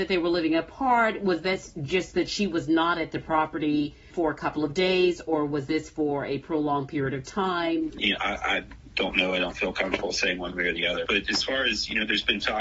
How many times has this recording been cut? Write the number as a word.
two